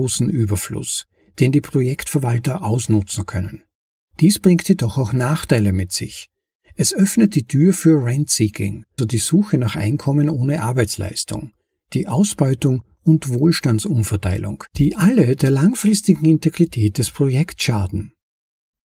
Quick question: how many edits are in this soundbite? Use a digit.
2